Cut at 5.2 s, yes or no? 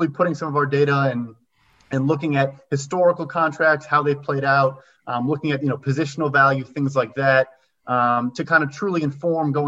no